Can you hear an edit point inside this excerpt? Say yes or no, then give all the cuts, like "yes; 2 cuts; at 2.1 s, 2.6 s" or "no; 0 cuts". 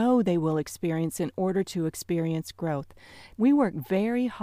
yes; 1 cut; at 3.3 s